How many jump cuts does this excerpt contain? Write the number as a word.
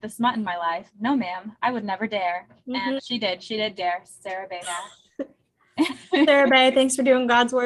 one